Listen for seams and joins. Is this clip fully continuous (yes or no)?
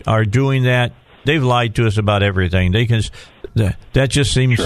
no